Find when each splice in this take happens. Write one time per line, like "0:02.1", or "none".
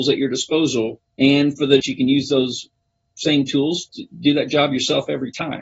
0:01.8